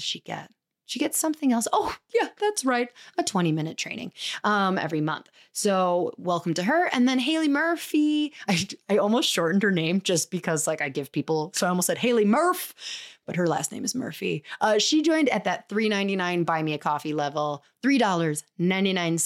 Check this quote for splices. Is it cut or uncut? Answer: uncut